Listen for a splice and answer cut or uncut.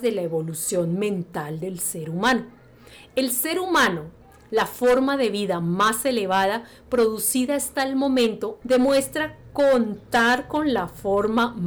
cut